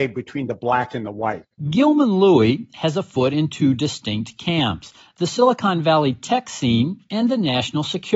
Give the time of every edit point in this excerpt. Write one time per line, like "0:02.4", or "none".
none